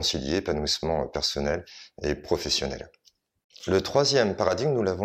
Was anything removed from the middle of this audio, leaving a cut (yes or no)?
no